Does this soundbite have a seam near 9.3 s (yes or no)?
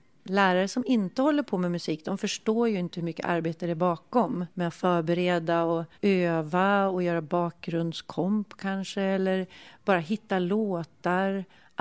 no